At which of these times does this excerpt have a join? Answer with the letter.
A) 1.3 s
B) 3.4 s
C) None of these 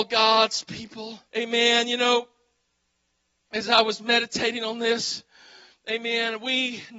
A